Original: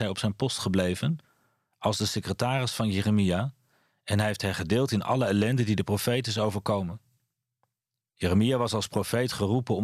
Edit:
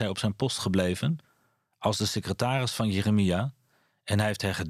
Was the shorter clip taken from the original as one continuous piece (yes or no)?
yes